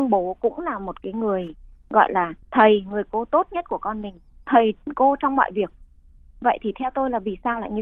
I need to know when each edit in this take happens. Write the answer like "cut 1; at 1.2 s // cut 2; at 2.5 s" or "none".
cut 1; at 2.4 s